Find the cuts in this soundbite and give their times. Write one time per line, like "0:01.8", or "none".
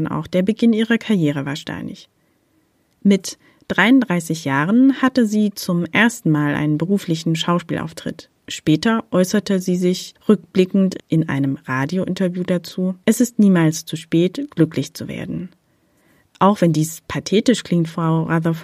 0:08.4